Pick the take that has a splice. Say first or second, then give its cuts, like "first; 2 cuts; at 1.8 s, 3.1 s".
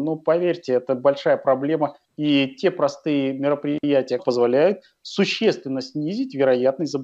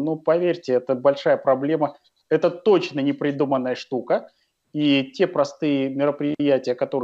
first; 2 cuts; at 2.0 s, 4.2 s